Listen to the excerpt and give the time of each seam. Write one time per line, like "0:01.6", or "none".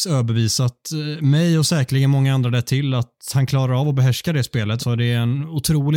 0:04.8